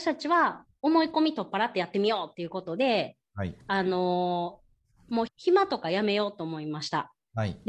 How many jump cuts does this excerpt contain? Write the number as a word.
one